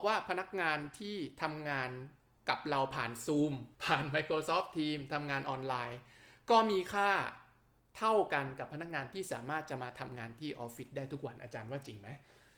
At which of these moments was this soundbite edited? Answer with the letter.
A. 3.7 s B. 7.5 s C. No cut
A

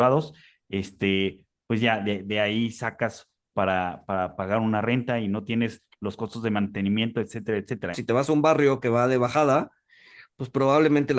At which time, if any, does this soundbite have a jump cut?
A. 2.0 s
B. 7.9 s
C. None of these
B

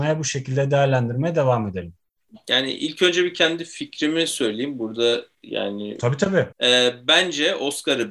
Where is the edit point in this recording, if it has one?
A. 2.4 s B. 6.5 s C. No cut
B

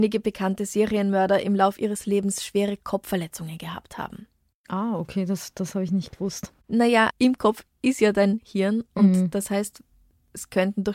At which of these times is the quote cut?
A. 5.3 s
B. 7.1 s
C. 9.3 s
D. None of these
B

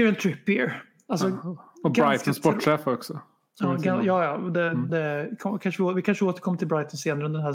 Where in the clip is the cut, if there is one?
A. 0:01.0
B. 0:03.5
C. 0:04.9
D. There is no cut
C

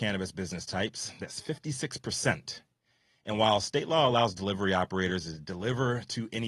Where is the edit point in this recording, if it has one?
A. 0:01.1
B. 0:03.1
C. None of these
C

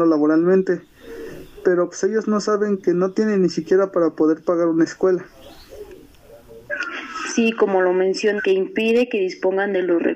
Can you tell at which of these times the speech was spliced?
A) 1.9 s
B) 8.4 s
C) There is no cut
B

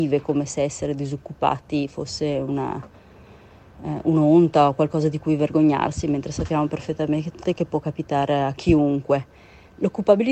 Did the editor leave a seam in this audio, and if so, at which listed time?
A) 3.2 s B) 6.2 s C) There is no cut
C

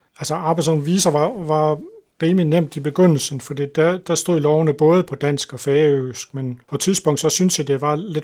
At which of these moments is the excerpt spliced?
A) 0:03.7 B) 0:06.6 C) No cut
B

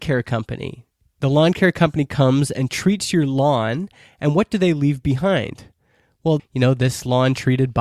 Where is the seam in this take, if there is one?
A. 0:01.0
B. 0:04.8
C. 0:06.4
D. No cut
C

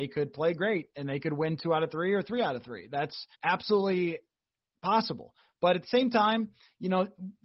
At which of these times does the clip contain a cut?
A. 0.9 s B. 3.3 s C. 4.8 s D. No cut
B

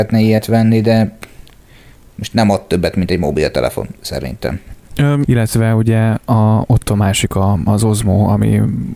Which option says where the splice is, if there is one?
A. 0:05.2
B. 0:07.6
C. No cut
A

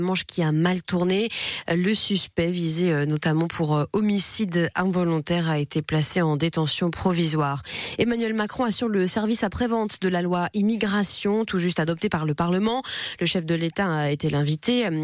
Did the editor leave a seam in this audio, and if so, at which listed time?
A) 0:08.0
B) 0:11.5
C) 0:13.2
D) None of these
D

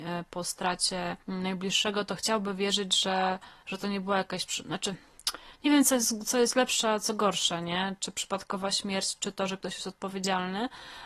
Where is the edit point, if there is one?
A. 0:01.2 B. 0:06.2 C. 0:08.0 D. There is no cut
A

